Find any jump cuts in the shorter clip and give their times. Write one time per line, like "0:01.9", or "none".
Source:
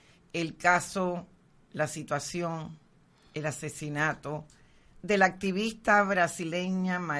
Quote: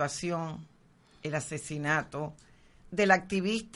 none